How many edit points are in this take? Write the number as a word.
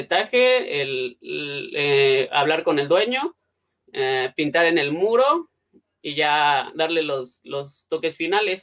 zero